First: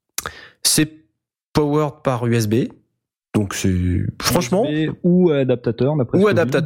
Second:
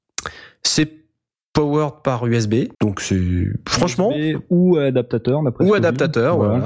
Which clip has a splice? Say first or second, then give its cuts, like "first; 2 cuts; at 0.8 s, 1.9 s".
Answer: second; 1 cut; at 2.7 s